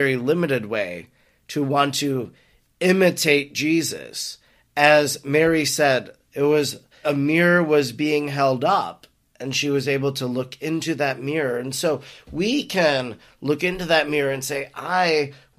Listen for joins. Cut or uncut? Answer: cut